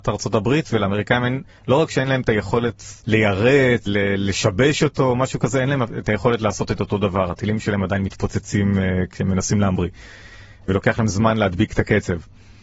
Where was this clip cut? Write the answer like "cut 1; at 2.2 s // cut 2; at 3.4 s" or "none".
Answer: cut 1; at 3.9 s